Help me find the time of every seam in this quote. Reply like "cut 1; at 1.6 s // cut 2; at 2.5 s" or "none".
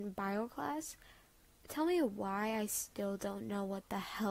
none